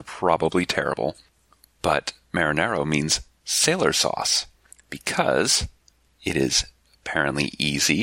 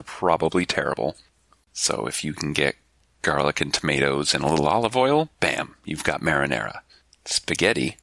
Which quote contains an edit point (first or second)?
second